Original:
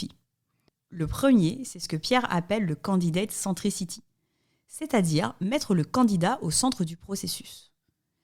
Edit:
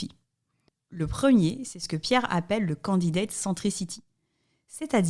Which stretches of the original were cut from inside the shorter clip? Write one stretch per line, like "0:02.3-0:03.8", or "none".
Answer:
none